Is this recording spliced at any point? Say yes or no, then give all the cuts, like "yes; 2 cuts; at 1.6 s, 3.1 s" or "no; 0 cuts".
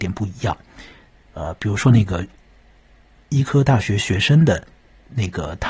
no; 0 cuts